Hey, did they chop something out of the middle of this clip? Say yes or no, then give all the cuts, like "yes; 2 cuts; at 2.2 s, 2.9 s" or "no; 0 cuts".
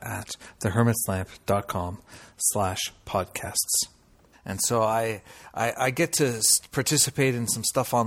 yes; 1 cut; at 4.3 s